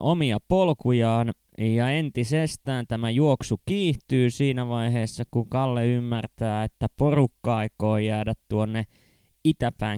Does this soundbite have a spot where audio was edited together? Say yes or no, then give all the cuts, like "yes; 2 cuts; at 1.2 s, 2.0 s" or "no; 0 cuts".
no; 0 cuts